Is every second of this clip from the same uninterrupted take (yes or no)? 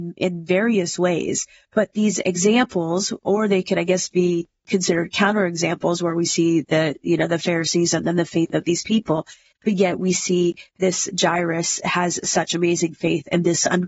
no